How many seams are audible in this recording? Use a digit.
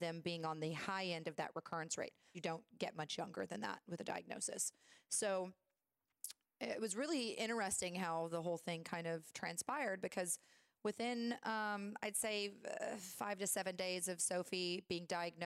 1